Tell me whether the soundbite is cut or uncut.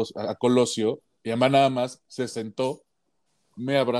uncut